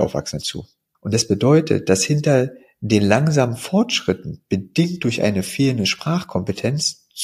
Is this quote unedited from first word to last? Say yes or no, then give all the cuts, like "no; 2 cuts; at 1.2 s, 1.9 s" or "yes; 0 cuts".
yes; 0 cuts